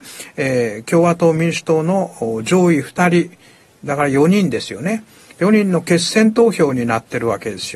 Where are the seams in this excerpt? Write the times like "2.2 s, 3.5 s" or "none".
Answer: none